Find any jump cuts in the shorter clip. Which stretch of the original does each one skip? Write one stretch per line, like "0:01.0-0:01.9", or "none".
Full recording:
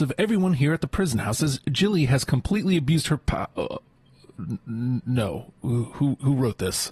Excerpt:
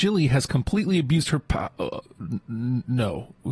0:03.8-0:04.2